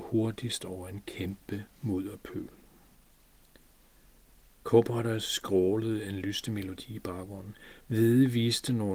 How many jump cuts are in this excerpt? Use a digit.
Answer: 1